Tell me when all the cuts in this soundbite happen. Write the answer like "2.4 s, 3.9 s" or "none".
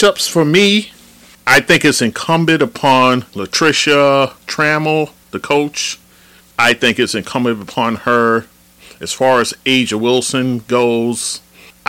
3.3 s